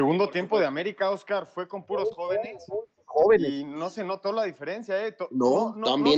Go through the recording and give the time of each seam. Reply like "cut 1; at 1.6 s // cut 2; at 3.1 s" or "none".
none